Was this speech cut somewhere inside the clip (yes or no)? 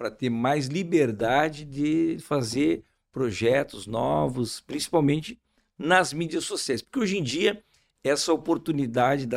no